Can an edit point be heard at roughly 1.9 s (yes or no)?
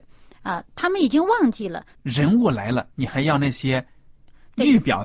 yes